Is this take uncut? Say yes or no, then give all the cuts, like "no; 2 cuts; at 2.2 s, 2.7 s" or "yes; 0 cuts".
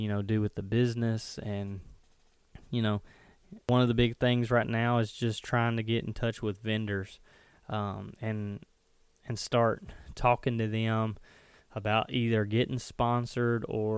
yes; 0 cuts